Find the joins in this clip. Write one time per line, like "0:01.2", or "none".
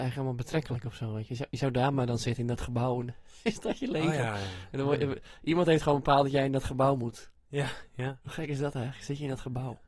none